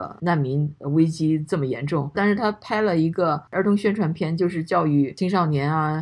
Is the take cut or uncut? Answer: cut